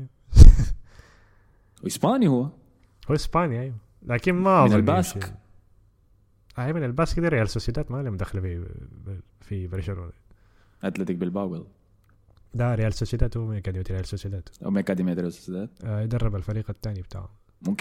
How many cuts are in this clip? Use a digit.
0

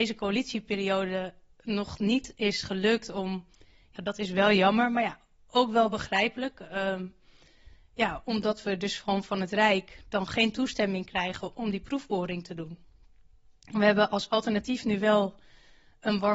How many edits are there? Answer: 1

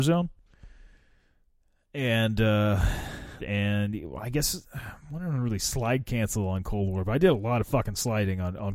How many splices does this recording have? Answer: 1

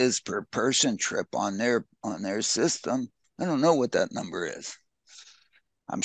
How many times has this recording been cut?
1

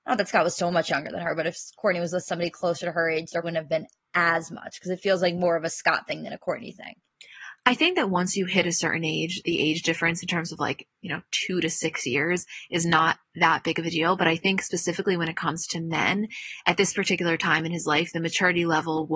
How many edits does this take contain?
1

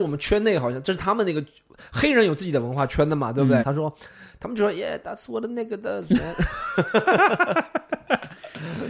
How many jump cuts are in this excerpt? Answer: 1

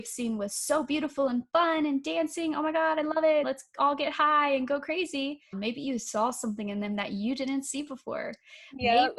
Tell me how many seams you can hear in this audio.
2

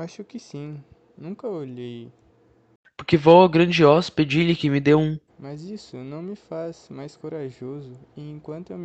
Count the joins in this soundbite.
1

